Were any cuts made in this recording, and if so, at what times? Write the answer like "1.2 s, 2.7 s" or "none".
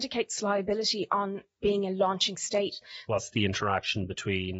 3.1 s